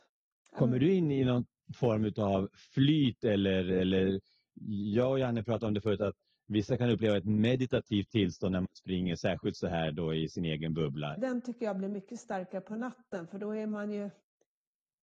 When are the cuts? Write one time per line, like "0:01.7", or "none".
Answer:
0:11.2